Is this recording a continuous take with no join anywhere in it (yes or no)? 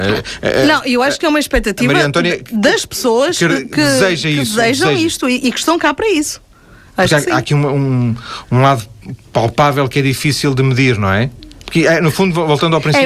yes